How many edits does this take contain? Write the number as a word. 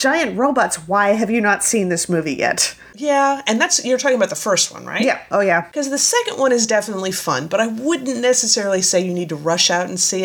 zero